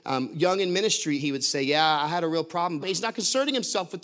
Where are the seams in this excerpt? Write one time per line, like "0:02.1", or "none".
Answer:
0:01.2
0:02.8